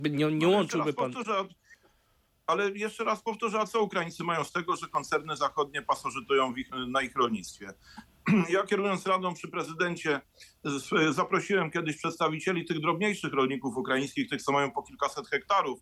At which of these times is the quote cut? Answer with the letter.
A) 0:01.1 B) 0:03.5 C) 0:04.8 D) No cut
D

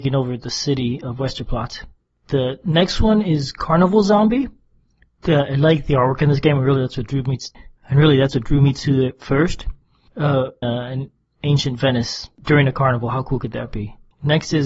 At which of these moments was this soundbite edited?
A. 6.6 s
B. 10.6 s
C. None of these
B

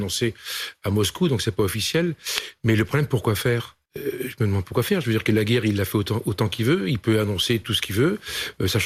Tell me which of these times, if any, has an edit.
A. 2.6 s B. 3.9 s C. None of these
B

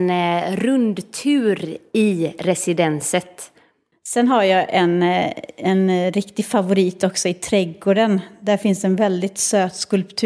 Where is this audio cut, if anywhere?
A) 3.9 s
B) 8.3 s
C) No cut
A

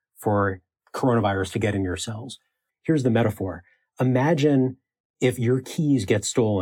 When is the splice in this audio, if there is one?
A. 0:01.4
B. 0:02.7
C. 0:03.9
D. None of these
B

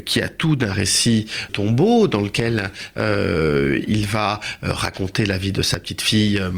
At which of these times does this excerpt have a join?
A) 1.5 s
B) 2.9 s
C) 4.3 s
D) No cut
A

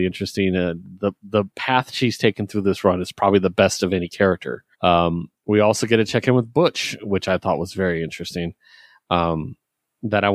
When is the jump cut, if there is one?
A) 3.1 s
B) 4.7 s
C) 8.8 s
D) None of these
B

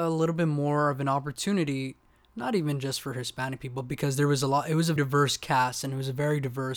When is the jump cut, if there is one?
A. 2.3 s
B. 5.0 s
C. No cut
B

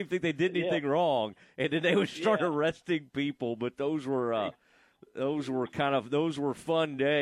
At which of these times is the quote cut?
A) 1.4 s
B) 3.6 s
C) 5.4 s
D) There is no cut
A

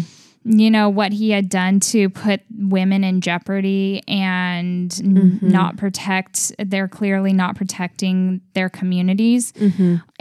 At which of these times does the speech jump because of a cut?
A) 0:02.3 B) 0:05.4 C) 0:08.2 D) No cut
D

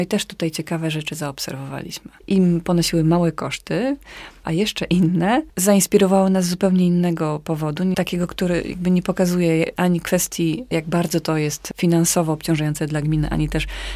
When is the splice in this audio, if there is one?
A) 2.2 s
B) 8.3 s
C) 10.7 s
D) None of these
A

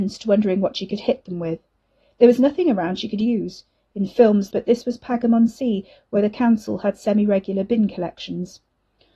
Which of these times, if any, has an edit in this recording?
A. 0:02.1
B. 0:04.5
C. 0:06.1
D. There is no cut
B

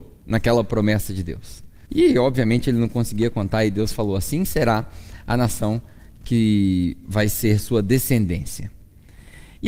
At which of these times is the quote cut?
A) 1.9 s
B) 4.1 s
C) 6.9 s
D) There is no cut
A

